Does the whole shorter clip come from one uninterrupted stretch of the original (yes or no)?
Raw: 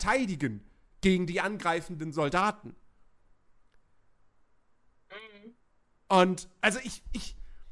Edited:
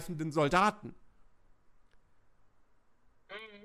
yes